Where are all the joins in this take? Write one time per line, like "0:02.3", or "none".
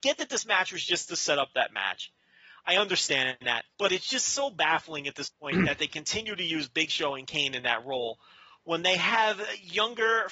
0:03.7